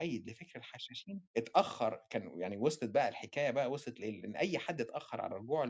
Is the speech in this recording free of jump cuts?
no; 1 cut; at 1.3 s

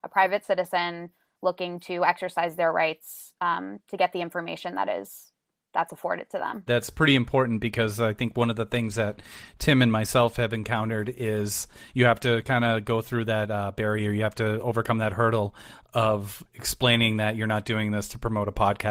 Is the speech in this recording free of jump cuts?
no; 1 cut; at 6.7 s

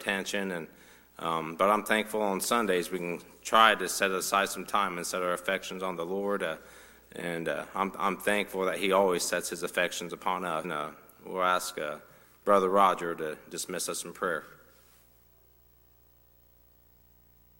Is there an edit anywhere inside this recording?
yes; 1 cut; at 10.6 s

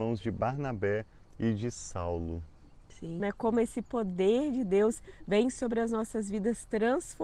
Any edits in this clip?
yes; 1 cut; at 3.2 s

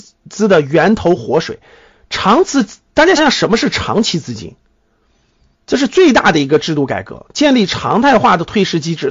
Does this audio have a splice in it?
yes; 2 cuts; at 3.2 s, 5.5 s

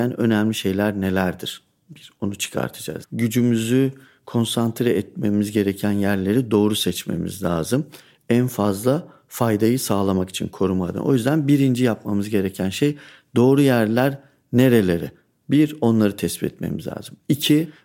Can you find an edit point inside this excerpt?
yes; 1 cut; at 3.0 s

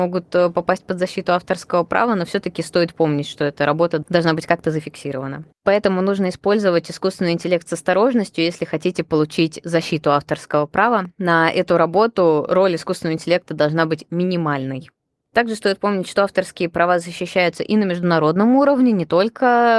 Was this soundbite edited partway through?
yes; 1 cut; at 5.6 s

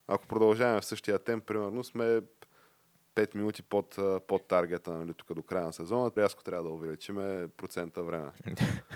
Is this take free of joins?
no; 1 cut; at 6.2 s

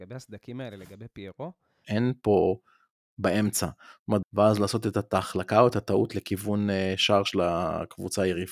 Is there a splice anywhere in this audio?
yes; 2 cuts; at 1.8 s, 4.2 s

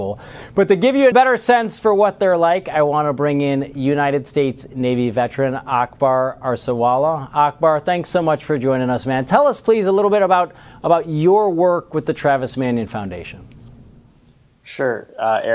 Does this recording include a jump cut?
yes; 1 cut; at 1.1 s

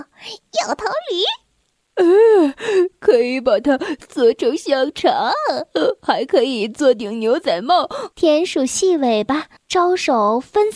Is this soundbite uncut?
no; 2 cuts; at 8.1 s, 9.6 s

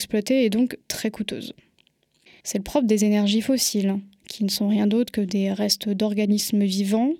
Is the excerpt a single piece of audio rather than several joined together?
no; 1 cut; at 2.4 s

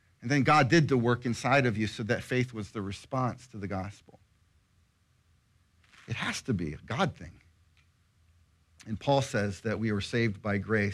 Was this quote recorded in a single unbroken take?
yes; 0 cuts

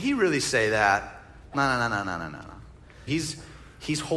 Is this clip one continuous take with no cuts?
no; 1 cut; at 3.1 s

